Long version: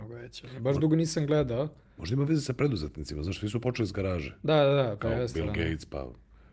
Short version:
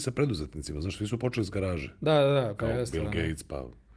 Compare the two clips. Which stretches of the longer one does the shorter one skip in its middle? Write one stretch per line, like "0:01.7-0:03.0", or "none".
none